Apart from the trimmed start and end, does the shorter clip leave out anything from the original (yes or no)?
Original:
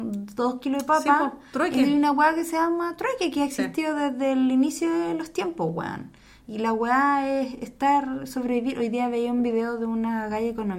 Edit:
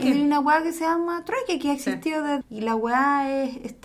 yes